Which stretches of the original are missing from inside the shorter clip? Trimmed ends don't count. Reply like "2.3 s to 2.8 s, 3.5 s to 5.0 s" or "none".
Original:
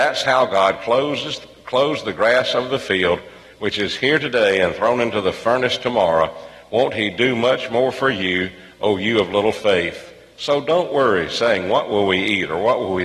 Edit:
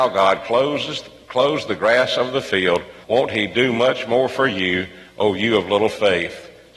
3.4 s to 6.7 s